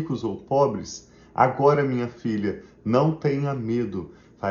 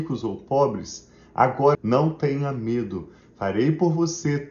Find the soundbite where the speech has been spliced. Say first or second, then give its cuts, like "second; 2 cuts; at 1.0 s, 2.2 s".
second; 1 cut; at 1.7 s